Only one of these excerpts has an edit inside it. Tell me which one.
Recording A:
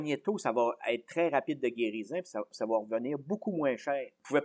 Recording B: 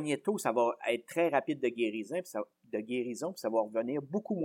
A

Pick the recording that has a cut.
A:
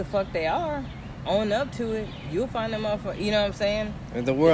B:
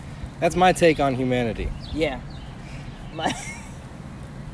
B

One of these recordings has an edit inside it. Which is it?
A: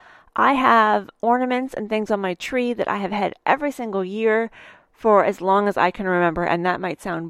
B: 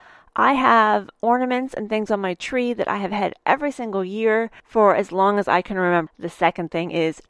B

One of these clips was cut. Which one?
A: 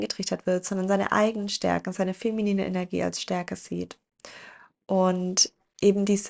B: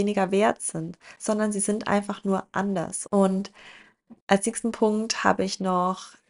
B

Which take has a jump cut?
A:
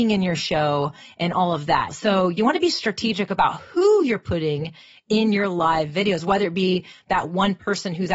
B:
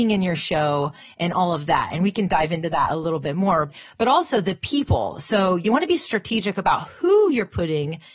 A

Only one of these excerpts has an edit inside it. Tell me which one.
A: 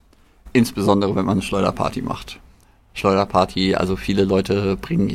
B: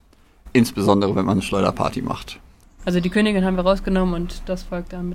B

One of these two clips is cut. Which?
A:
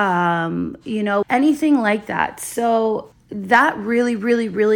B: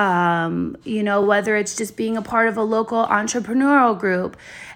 A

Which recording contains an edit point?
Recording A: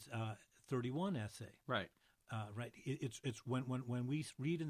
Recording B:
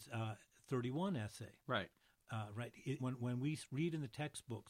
B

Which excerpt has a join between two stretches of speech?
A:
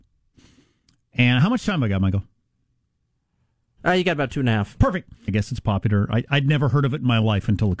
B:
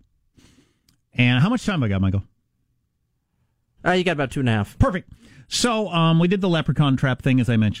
A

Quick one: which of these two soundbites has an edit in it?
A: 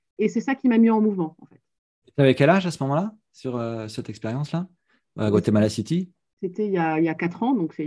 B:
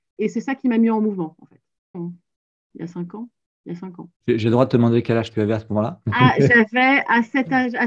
B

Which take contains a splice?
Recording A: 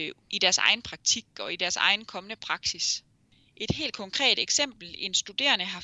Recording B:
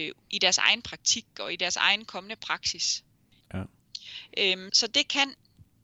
B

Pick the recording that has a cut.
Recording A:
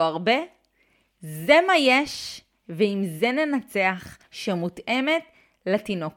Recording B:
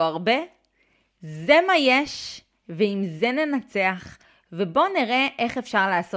A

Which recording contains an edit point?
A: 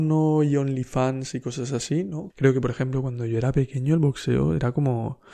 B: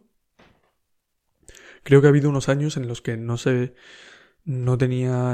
A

